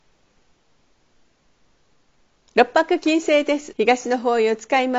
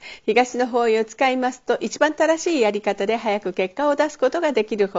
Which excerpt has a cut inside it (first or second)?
first